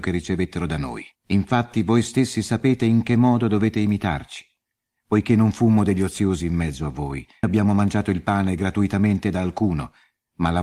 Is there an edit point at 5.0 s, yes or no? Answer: no